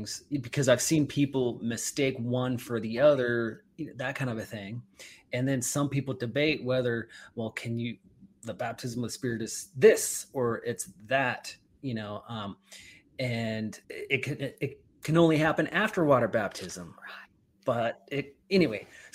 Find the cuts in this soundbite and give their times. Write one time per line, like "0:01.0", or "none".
0:13.8